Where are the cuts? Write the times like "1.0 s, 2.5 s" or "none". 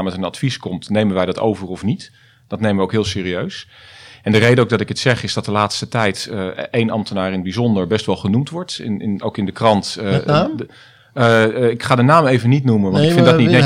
9.2 s